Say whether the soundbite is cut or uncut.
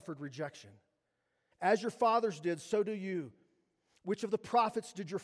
cut